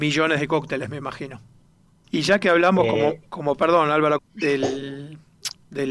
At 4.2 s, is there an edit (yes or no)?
yes